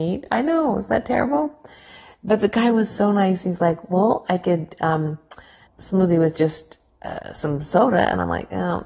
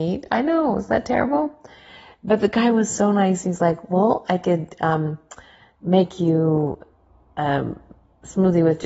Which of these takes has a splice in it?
first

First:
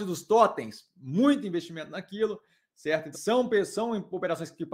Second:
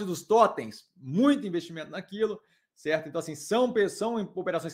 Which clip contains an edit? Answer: first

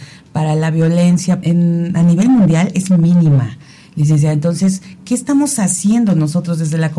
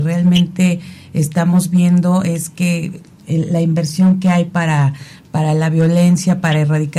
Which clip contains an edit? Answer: first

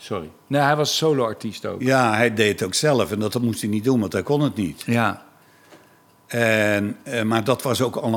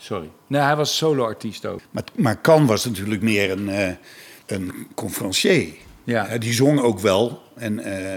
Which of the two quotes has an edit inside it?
second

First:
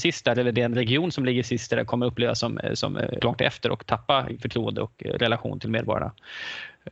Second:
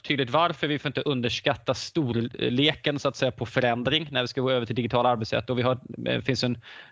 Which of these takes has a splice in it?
first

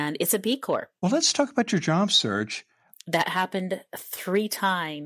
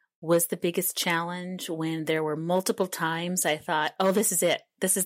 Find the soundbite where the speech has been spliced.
first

